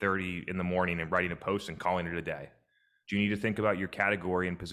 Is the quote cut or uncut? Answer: cut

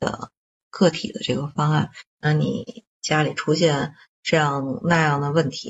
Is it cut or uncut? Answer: cut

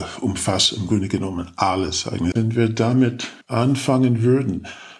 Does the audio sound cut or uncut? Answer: cut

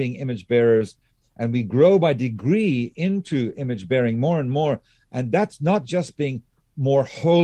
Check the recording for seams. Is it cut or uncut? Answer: uncut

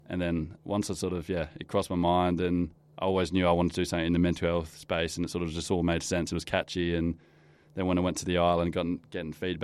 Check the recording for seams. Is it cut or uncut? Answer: uncut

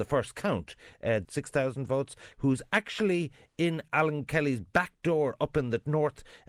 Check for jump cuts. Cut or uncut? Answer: cut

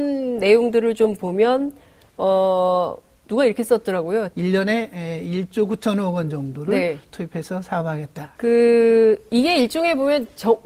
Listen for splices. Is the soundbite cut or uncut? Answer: cut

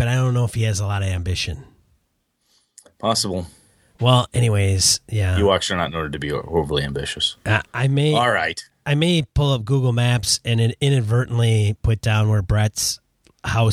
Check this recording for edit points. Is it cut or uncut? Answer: uncut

